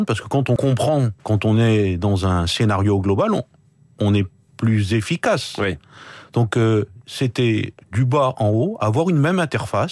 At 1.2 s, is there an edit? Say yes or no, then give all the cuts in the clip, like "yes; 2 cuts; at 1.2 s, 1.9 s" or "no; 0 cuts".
yes; 1 cut; at 1.2 s